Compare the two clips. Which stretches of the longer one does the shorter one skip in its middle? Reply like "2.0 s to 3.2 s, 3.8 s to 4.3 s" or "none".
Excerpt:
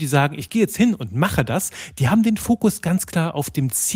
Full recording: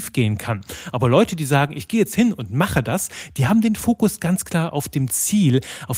none